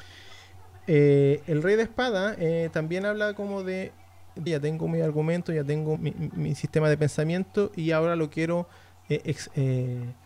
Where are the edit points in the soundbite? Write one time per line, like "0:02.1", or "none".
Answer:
0:04.5
0:06.0